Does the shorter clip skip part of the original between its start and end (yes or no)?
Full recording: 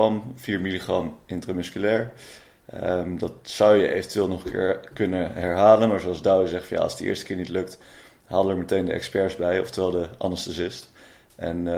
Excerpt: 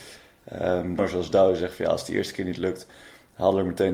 yes